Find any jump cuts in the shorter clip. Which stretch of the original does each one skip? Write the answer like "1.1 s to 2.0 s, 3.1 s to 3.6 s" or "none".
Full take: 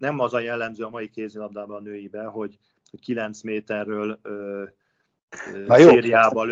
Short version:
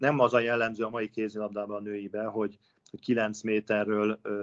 none